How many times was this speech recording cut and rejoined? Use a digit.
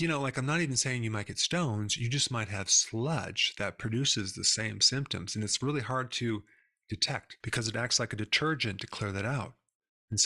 1